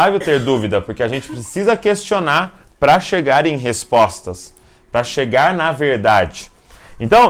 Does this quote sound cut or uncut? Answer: uncut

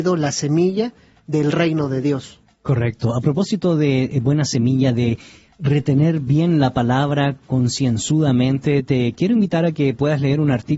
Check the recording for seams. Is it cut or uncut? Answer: uncut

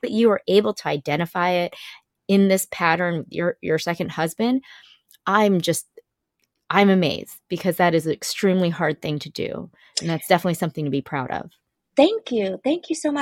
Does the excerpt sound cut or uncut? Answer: uncut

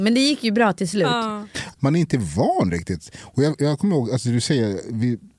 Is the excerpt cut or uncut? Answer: cut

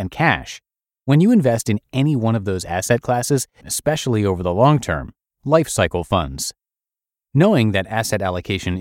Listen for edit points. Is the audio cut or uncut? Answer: cut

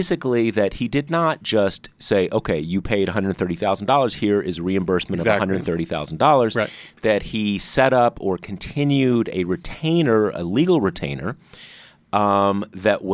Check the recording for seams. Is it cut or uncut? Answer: uncut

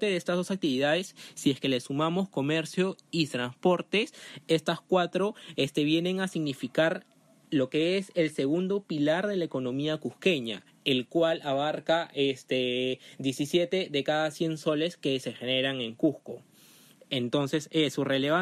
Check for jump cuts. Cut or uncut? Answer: uncut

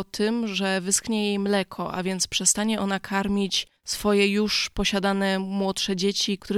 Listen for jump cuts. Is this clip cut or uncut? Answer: cut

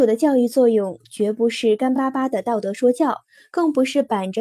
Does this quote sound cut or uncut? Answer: uncut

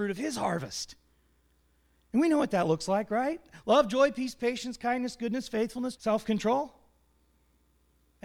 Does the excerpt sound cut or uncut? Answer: cut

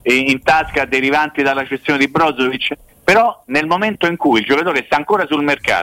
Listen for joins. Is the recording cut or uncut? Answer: cut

